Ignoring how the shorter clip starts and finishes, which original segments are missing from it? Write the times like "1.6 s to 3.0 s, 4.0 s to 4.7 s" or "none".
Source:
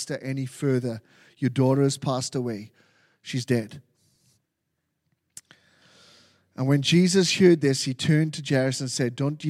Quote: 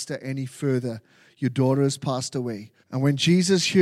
2.8 s to 6.5 s